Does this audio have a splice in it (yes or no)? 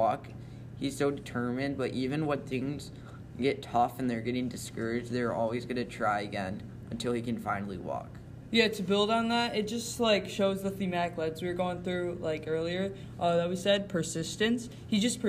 no